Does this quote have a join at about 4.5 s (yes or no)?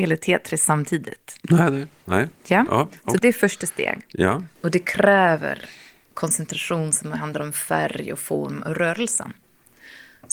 yes